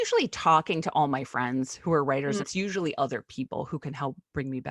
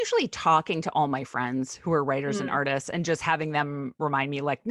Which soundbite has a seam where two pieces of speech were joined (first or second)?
first